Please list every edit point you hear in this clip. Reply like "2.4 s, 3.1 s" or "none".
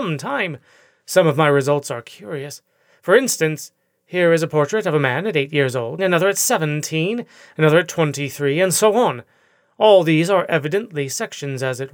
6.0 s